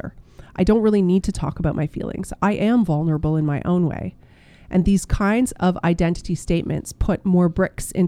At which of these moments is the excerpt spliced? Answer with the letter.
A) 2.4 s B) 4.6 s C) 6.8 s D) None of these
D